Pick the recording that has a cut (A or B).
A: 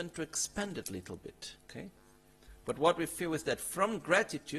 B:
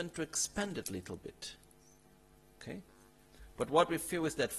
A